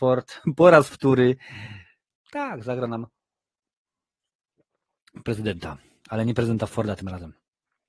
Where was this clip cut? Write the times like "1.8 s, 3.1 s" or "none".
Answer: 2.1 s